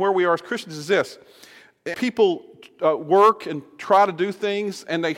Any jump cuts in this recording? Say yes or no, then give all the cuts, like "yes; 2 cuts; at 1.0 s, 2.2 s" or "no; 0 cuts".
yes; 1 cut; at 1.9 s